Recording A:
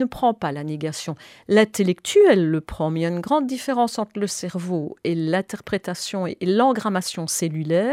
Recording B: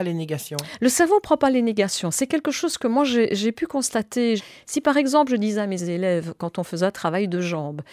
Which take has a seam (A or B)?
B